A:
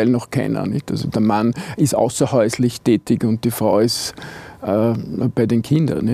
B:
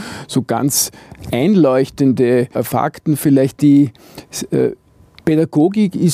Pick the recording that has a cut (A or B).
B